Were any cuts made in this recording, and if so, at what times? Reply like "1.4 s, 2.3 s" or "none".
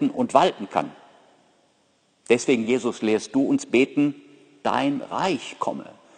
none